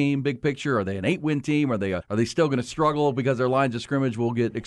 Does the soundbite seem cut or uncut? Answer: cut